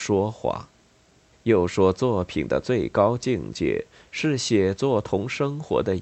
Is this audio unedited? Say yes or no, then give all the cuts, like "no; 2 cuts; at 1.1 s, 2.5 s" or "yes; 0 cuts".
no; 1 cut; at 1.3 s